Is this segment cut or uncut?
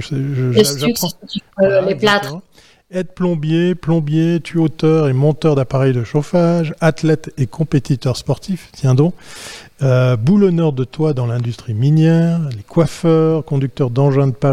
uncut